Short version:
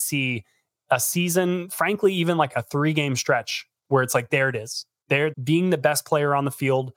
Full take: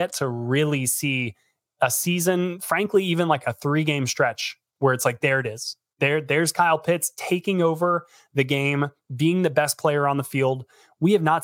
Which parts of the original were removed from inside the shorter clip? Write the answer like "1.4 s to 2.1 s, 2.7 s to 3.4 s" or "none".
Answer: 6.2 s to 9.0 s